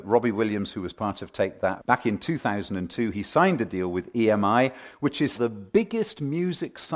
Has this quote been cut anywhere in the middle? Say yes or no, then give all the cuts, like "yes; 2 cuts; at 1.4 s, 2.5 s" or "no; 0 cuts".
yes; 2 cuts; at 1.8 s, 5.3 s